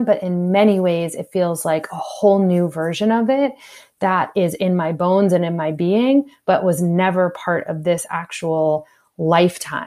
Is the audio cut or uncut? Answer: uncut